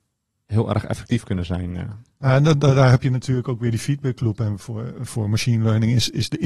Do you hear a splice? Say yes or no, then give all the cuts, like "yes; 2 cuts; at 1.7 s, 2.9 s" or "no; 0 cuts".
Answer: no; 0 cuts